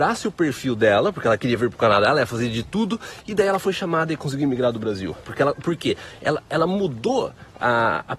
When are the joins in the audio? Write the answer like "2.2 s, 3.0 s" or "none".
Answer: 5.2 s